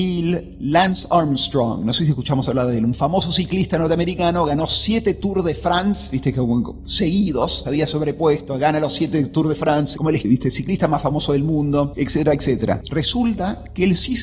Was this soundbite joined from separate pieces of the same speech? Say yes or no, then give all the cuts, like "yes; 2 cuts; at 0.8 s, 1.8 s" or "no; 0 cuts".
yes; 2 cuts; at 7.6 s, 9.9 s